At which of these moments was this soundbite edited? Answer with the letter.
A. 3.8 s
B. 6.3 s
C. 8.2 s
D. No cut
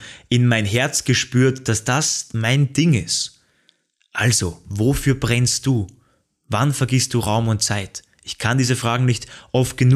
D